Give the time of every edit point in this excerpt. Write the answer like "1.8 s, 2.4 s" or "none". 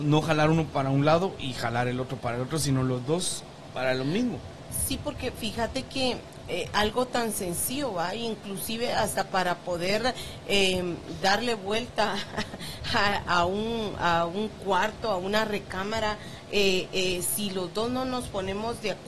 none